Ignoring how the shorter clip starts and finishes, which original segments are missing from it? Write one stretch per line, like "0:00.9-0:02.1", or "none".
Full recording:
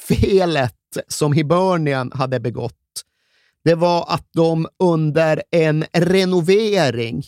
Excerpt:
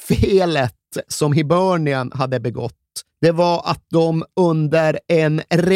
0:03.1-0:03.5